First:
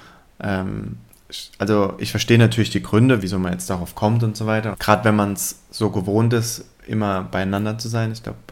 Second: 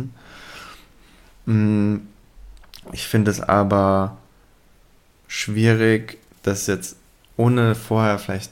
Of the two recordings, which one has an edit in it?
first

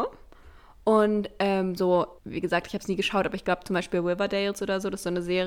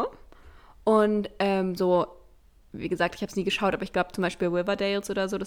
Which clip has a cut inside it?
first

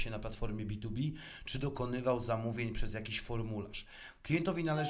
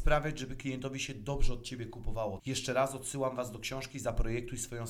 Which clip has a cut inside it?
second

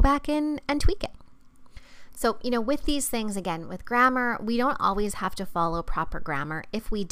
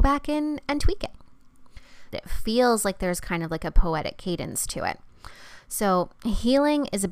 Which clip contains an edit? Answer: second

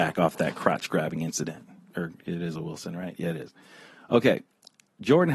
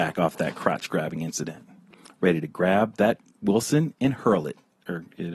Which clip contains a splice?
first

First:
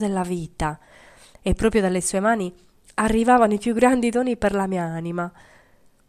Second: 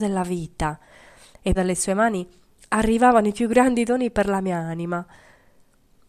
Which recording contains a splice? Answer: second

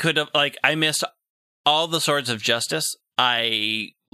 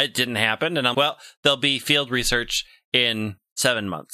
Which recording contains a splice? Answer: second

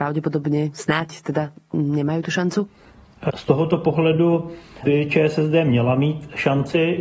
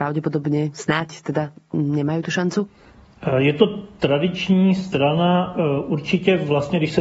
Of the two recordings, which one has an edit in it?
first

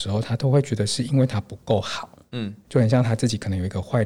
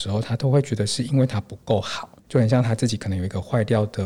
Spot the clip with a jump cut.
second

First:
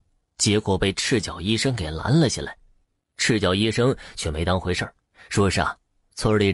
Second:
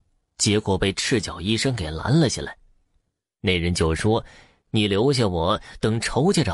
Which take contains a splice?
first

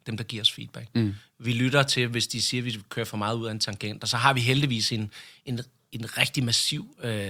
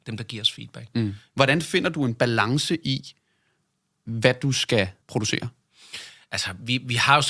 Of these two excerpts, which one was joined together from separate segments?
second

